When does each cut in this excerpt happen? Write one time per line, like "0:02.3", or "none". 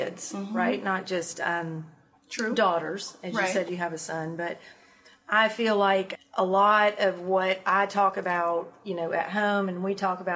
0:06.1